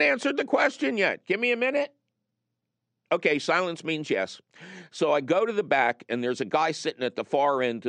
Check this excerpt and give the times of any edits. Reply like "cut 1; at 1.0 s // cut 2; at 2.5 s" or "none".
none